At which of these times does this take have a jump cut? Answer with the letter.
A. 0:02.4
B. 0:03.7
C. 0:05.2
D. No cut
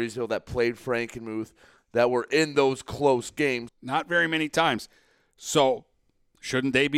B